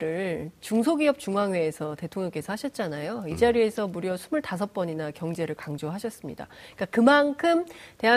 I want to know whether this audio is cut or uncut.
uncut